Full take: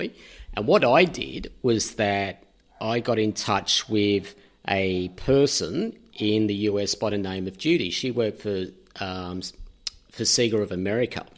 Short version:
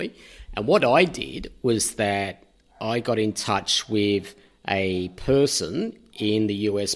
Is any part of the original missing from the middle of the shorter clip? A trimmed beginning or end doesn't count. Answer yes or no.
no